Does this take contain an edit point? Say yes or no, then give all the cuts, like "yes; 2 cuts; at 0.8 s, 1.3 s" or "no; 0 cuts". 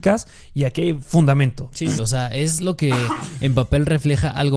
yes; 1 cut; at 2.0 s